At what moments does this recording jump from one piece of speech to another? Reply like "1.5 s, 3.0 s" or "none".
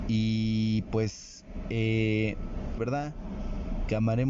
2.8 s